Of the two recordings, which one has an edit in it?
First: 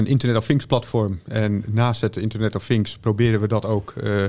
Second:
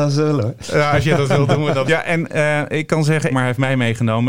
second; 2 cuts; at 1.8 s, 3.3 s

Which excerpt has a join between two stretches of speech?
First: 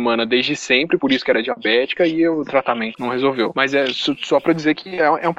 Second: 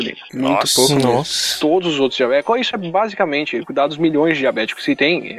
first; 1 cut; at 2.9 s

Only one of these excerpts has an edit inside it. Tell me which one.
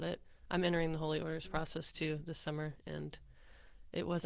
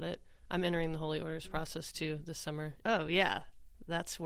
second; 1 cut; at 2.8 s

